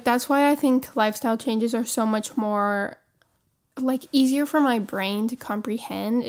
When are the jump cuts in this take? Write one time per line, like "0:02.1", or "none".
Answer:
none